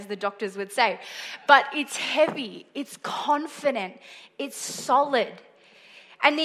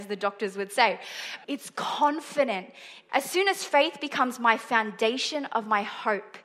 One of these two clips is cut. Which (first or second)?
second